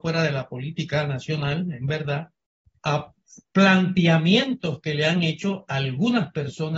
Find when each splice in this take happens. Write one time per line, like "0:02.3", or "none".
0:02.8